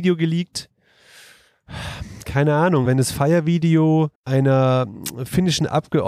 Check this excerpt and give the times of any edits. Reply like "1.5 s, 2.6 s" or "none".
2.9 s, 4.1 s